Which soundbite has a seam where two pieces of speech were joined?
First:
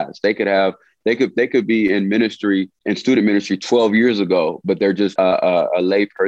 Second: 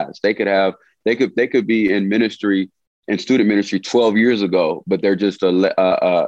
first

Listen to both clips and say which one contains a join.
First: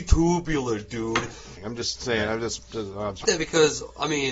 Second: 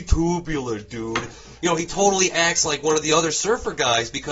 first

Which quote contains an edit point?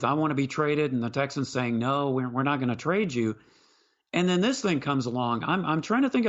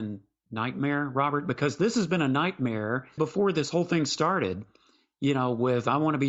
second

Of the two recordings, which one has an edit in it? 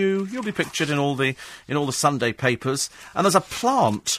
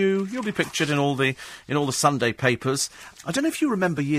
second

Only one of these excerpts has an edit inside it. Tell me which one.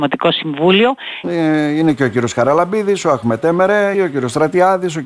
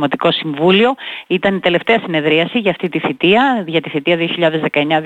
first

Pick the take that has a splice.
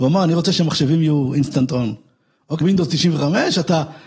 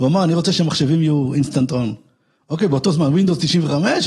first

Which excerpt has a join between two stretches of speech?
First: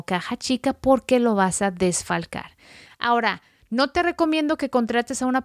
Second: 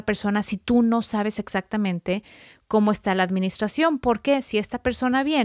first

